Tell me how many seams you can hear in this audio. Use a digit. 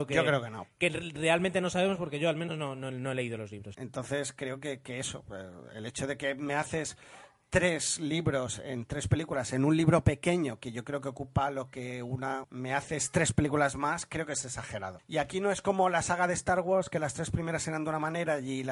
3